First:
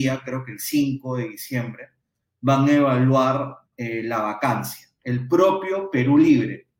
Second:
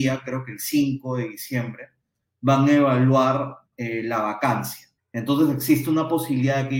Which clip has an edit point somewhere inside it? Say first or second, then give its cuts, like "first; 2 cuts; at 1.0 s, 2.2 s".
second; 1 cut; at 5.0 s